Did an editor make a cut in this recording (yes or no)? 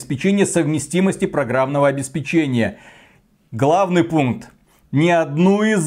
no